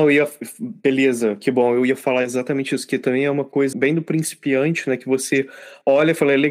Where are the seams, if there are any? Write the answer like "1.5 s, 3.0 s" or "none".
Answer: 3.7 s